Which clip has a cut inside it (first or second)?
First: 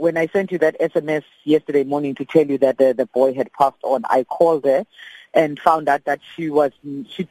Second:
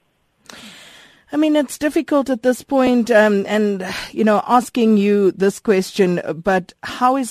first